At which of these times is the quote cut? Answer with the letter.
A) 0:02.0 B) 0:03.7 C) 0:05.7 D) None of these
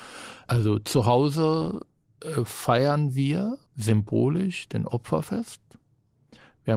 B